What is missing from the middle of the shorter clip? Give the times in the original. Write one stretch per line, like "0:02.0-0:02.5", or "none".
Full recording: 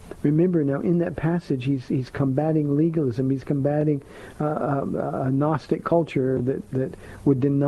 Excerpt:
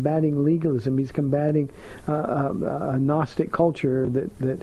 none